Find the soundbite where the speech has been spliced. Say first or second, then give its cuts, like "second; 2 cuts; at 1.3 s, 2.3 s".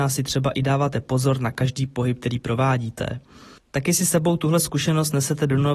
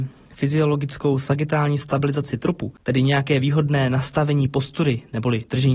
first; 1 cut; at 3.6 s